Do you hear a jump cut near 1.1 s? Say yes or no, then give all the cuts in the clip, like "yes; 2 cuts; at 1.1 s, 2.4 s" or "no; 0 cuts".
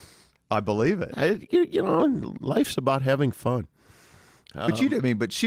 no; 0 cuts